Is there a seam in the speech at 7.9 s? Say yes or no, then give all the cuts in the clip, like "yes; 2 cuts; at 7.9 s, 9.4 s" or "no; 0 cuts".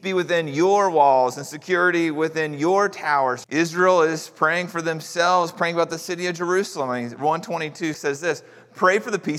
yes; 2 cuts; at 3.4 s, 7.9 s